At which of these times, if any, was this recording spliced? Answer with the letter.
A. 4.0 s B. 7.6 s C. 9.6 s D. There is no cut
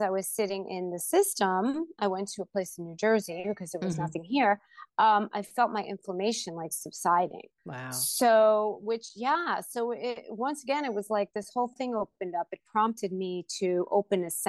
B